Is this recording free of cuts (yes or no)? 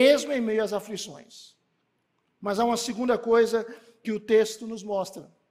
yes